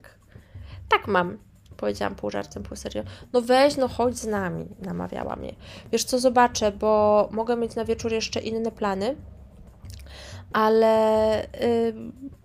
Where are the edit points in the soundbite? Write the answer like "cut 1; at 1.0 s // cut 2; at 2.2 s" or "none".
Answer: none